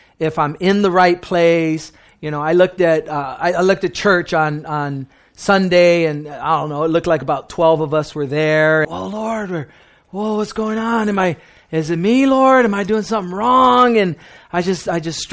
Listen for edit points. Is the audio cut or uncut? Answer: cut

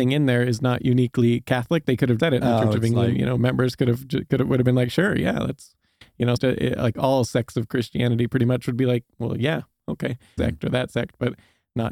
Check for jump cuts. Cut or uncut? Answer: cut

